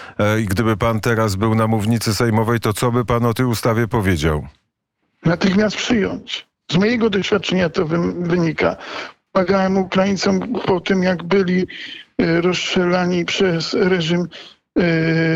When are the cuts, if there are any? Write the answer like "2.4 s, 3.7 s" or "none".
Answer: none

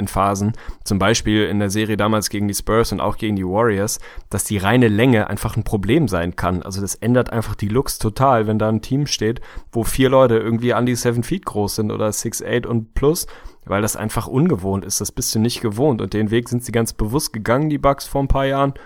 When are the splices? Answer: none

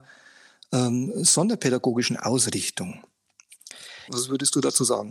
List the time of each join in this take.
4.1 s

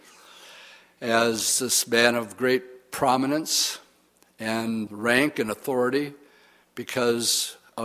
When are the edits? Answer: 4.9 s

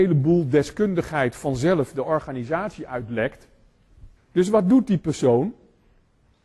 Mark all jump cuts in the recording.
4.2 s

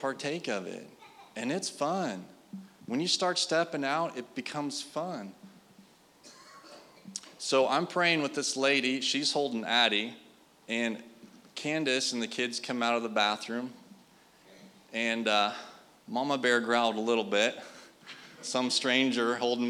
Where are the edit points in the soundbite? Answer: none

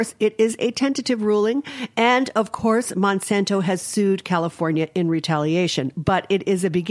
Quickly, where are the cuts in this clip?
none

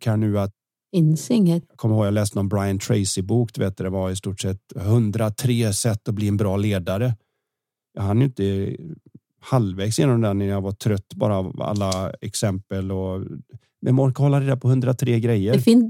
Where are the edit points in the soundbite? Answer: none

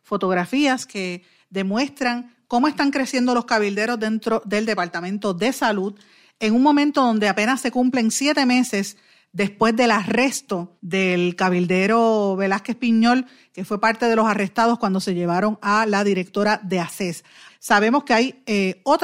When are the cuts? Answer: 10.8 s, 17.5 s

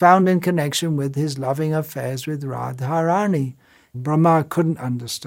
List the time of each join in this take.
3.9 s

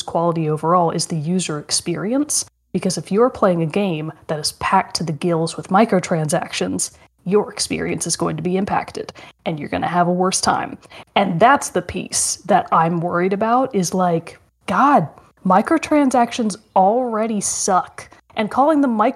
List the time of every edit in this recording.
none

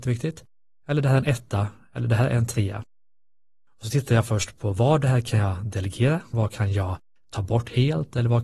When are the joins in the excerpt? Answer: 6.3 s

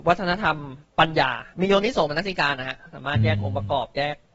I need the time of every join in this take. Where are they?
1.5 s

